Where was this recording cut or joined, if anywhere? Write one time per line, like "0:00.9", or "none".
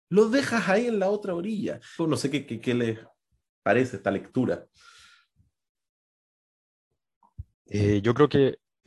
0:02.0